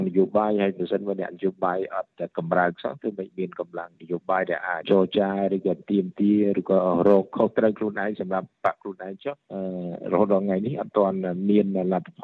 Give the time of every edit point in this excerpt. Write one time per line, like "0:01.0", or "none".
0:04.8